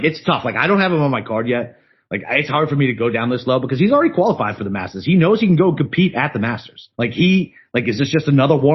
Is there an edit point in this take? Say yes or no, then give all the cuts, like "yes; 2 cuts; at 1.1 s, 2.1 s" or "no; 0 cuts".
yes; 1 cut; at 6.9 s